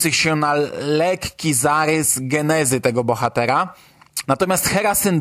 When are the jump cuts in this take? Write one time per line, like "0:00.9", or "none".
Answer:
0:04.2